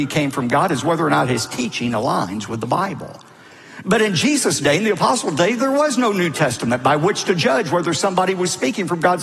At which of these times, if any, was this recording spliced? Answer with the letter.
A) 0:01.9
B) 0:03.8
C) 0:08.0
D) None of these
D